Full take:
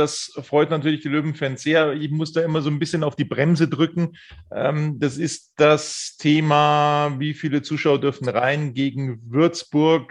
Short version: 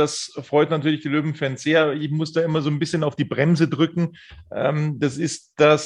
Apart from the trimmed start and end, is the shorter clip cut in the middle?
no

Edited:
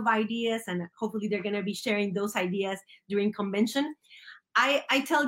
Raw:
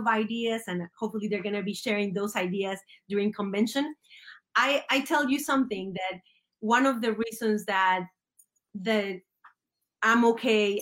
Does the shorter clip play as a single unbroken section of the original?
yes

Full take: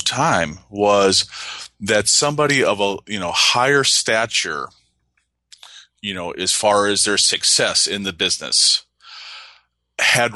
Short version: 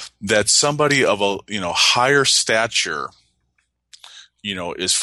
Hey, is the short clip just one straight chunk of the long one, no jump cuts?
yes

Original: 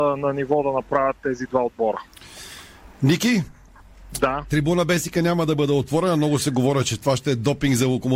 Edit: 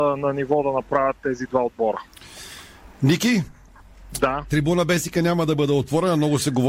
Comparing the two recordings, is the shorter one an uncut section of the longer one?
yes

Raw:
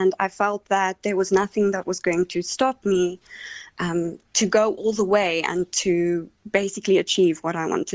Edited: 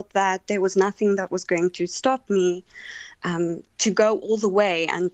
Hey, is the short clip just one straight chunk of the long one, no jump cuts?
yes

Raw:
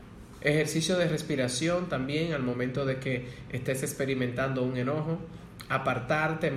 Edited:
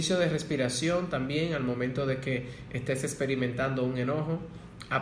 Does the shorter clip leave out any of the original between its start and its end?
no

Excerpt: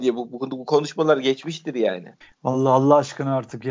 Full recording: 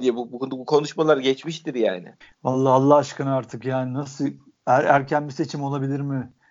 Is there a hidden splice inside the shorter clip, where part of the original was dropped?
no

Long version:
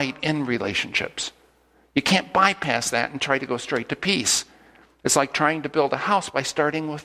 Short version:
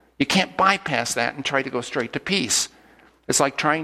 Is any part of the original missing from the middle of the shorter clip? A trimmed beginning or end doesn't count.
no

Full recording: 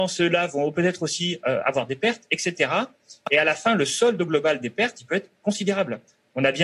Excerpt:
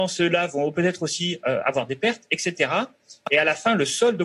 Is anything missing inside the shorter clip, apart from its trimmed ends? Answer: no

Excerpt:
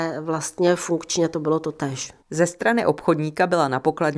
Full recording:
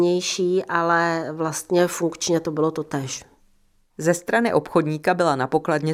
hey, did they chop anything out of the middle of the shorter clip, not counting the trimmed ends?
yes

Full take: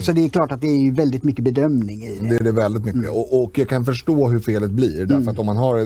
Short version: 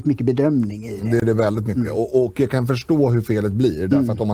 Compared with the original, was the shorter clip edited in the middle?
no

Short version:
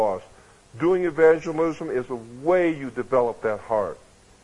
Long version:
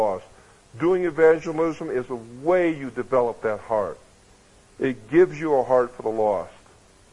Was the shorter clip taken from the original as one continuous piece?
yes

